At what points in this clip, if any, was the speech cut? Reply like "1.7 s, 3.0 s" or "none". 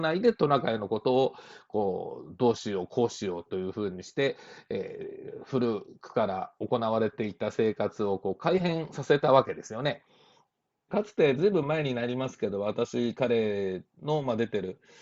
10.9 s

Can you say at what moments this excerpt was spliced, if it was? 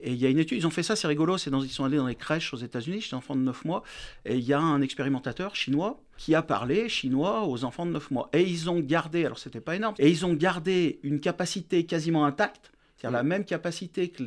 6.2 s, 9.9 s

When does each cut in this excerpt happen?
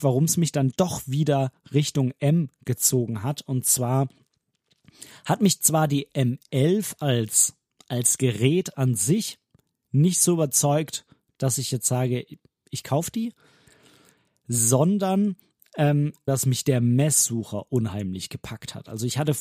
16.3 s

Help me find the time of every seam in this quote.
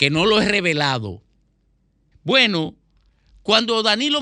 2.1 s

